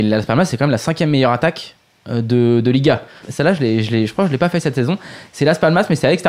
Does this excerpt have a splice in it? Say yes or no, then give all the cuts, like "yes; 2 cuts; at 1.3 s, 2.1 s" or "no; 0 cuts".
yes; 1 cut; at 3.2 s